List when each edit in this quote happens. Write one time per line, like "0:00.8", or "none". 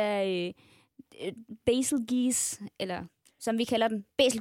none